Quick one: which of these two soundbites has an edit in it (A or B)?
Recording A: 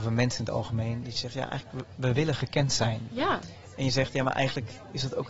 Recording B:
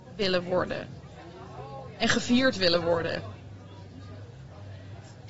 A